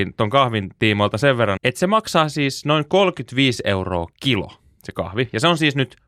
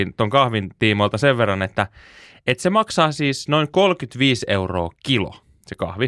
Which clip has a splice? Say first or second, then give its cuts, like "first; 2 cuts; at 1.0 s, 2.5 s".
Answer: first; 1 cut; at 1.6 s